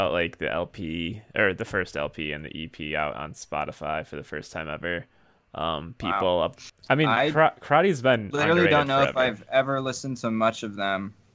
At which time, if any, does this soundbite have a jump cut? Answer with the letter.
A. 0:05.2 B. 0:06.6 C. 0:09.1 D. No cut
B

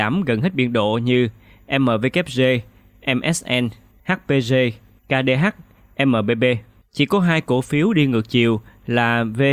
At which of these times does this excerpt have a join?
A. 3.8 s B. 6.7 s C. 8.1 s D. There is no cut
D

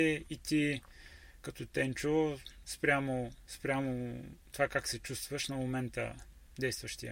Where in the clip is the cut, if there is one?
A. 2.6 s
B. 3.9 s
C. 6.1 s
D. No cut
D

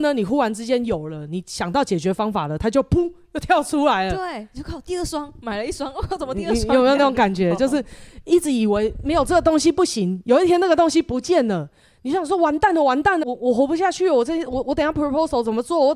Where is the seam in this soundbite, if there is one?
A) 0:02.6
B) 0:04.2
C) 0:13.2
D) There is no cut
C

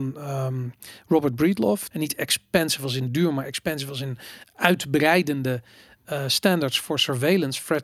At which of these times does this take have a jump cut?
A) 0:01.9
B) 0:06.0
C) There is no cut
A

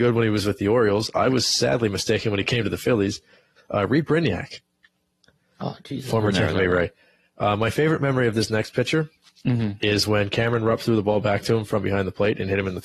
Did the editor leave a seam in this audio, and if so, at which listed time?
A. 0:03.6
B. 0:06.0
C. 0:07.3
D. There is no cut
A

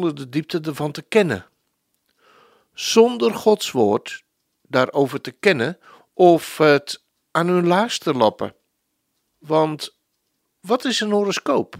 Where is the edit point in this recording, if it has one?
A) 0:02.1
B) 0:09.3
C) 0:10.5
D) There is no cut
B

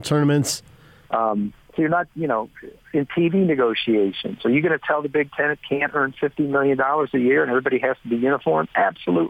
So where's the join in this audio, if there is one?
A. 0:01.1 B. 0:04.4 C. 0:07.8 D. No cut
A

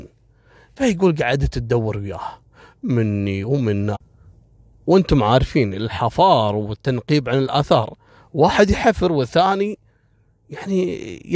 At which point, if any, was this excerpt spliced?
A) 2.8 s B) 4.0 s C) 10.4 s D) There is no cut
D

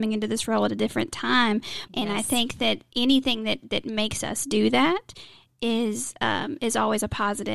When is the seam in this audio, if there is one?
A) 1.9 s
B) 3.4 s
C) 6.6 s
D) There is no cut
A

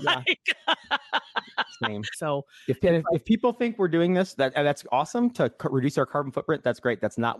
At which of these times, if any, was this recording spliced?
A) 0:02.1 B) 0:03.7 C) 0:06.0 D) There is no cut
A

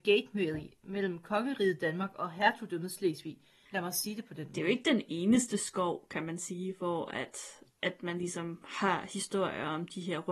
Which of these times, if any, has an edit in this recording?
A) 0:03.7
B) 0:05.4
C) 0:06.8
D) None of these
A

